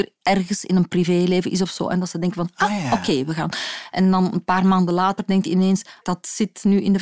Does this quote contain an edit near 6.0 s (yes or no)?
yes